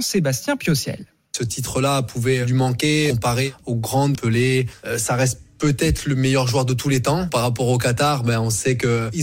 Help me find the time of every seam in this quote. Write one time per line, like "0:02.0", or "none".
0:04.1